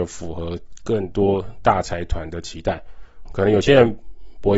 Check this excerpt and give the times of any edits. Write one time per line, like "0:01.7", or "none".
0:03.3